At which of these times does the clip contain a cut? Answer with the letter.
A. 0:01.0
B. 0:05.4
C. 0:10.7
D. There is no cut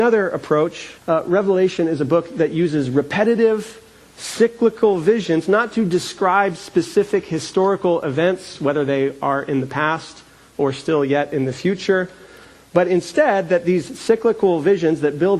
A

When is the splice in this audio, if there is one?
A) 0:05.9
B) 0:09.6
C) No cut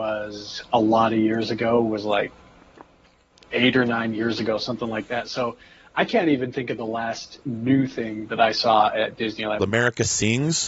B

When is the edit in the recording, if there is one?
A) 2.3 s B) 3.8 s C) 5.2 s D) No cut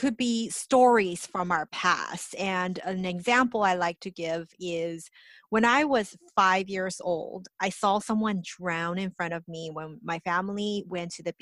D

